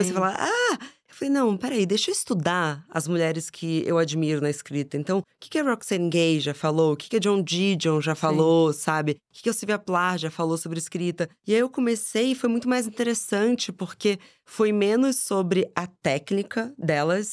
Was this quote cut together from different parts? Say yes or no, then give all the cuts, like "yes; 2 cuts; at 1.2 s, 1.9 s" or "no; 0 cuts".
no; 0 cuts